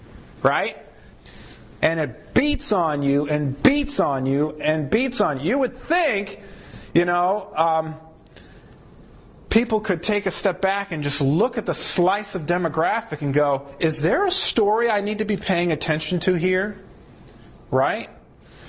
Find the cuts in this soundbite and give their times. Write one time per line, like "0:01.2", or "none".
0:01.8